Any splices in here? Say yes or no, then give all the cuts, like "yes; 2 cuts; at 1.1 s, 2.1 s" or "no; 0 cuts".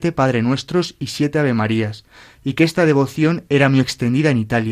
no; 0 cuts